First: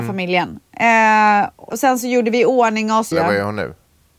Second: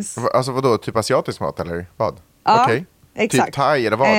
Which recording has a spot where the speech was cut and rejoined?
first; 2 cuts; at 1.7 s, 3.1 s

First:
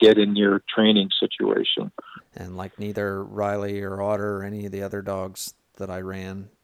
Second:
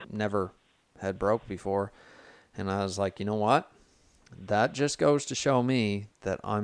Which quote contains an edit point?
first; 1 cut; at 2.2 s

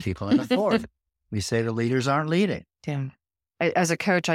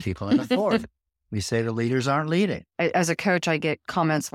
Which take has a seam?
second; 1 cut; at 2.7 s

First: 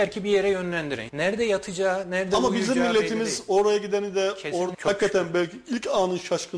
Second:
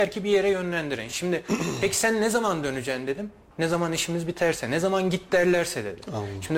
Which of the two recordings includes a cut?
first; 2 cuts; at 1.1 s, 4.7 s

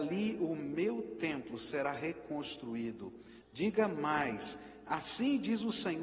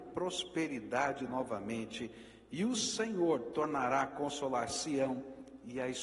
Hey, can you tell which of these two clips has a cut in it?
first; 1 cut; at 3.4 s

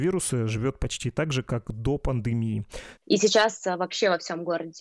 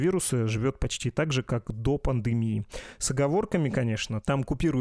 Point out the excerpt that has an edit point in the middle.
first; 1 cut; at 3.0 s

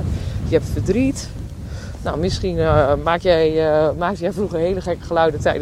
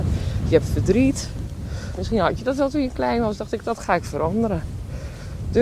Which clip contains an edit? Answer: second; 1 cut; at 2.0 s

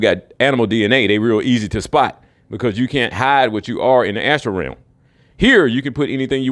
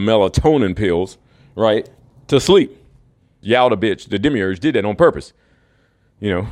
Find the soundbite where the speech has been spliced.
second; 1 cut; at 3.4 s

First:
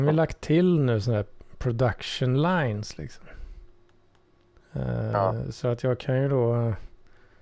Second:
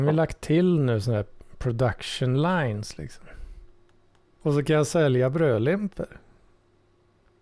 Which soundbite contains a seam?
second; 1 cut; at 4.4 s

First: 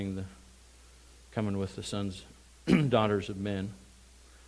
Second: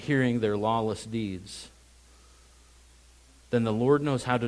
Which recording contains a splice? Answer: second; 1 cut; at 3.5 s

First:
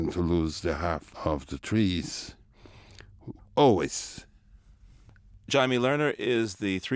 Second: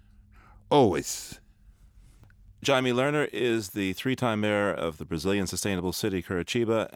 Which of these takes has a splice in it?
first; 1 cut; at 3.4 s

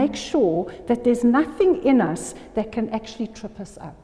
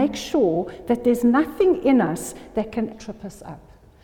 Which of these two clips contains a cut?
second; 1 cut; at 2.9 s

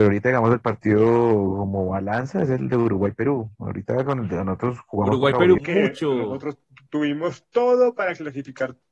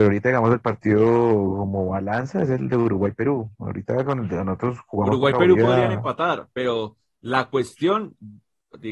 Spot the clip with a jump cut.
first; 1 cut; at 5.6 s

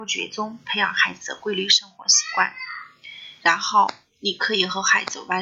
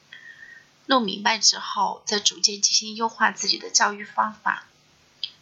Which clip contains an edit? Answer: first; 1 cut; at 3.4 s

